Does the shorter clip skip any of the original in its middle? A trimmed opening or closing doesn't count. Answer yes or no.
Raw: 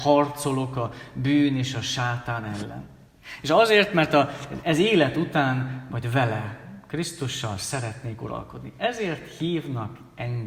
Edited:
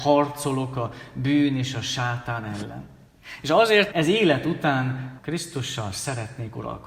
yes